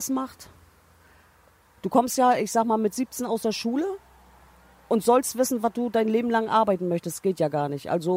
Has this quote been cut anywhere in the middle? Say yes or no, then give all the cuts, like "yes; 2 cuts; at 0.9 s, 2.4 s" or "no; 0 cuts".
no; 0 cuts